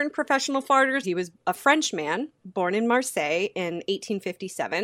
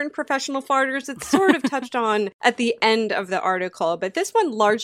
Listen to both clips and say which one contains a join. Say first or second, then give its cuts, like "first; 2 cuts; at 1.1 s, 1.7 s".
first; 1 cut; at 1.0 s